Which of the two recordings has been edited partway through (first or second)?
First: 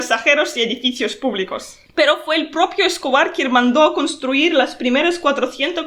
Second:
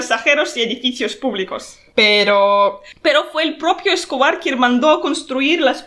first